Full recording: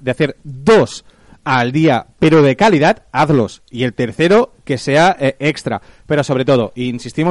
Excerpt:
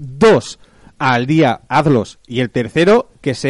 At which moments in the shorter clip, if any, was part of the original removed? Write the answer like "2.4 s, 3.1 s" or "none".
1.7 s